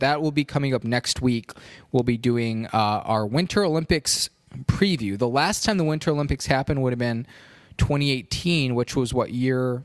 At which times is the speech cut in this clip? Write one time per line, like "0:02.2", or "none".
none